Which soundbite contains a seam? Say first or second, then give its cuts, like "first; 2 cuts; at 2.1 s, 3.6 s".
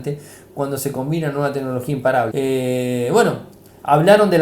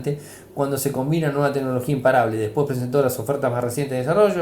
first; 1 cut; at 2.3 s